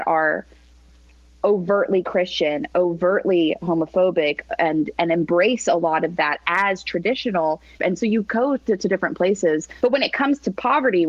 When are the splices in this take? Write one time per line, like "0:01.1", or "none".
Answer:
0:07.8
0:09.8